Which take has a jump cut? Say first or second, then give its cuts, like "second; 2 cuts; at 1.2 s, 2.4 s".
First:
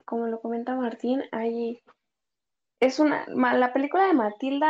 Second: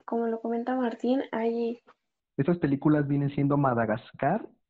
second; 1 cut; at 2.2 s